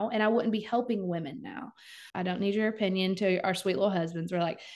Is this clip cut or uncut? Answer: cut